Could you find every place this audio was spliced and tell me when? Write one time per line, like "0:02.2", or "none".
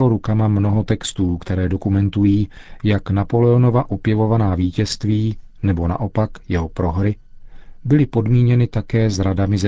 none